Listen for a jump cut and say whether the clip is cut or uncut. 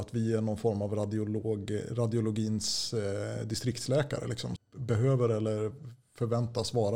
cut